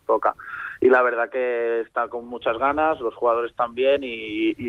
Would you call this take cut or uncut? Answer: uncut